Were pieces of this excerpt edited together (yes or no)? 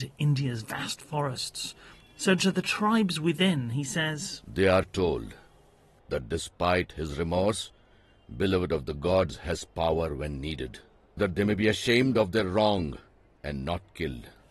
yes